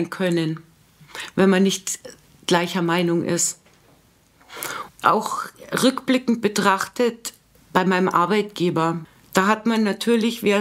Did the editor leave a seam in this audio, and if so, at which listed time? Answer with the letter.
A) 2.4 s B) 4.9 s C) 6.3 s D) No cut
B